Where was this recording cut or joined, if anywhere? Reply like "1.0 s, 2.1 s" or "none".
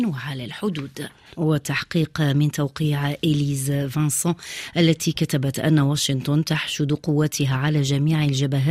1.3 s